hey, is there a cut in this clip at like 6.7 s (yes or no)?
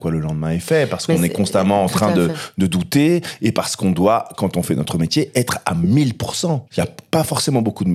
yes